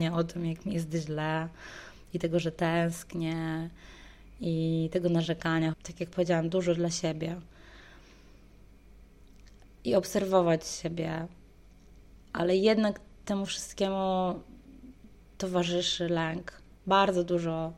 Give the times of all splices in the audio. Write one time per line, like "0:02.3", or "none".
0:05.7